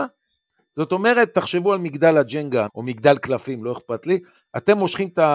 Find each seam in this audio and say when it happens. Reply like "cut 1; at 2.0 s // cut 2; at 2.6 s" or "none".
cut 1; at 2.7 s